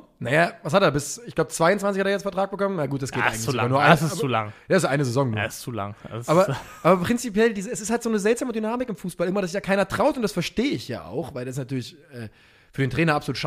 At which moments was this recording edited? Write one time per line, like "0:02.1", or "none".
none